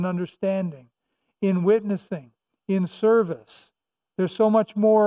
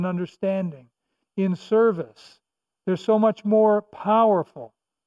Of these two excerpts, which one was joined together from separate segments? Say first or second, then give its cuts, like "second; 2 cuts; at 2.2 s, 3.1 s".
second; 1 cut; at 1.2 s